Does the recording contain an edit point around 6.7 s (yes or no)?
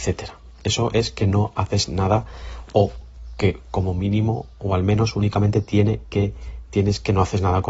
yes